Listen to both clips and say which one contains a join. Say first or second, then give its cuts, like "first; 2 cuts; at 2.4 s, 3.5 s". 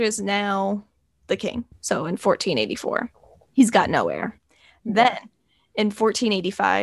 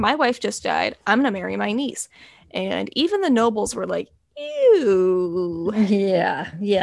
first; 1 cut; at 1.7 s